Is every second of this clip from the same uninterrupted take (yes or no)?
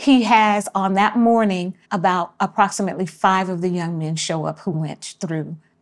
no